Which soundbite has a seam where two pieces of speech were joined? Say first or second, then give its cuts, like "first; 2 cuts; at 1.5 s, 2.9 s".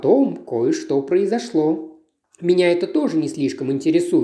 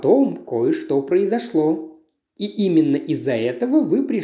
first; 1 cut; at 2.2 s